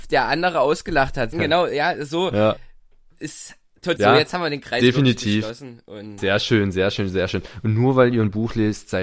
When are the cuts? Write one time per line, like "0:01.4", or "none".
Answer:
0:01.3
0:04.0